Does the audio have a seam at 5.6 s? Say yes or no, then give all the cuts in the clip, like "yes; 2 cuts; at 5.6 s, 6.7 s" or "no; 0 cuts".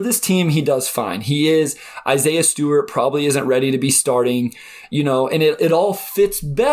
yes; 1 cut; at 5.6 s